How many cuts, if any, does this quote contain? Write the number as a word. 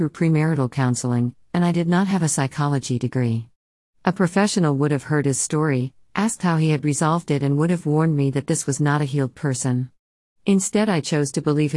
zero